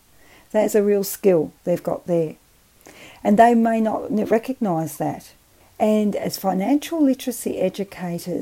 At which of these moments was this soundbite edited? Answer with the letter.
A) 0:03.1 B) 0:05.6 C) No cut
B